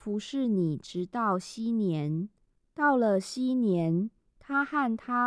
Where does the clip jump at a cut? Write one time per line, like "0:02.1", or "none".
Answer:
none